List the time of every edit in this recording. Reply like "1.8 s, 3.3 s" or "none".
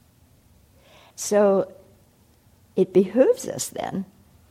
1.1 s